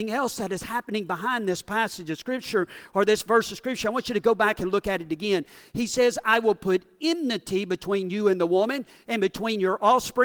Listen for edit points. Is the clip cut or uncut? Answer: uncut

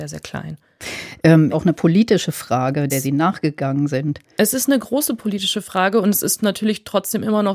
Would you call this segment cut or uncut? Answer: cut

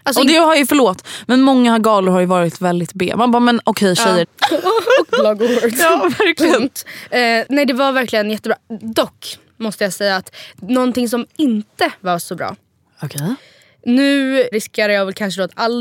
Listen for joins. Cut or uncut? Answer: cut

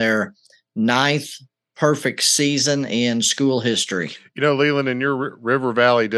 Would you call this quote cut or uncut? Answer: uncut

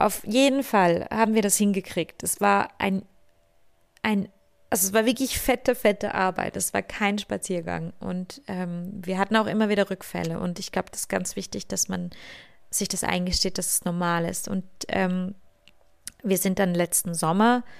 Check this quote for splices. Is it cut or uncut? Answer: uncut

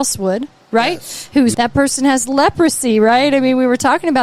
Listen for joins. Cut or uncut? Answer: cut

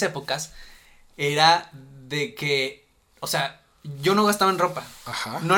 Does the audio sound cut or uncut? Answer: uncut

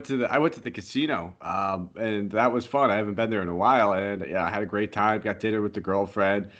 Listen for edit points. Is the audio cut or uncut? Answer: uncut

